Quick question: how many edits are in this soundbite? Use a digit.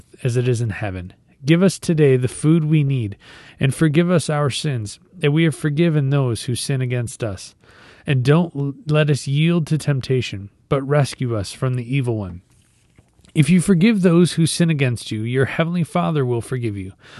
0